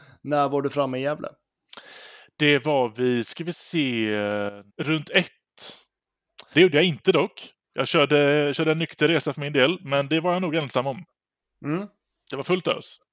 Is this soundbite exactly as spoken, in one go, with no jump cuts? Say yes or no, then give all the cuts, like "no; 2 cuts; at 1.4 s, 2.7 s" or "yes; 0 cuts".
no; 2 cuts; at 4.7 s, 6.5 s